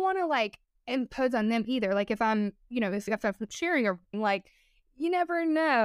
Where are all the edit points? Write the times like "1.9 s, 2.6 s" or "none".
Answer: 4.1 s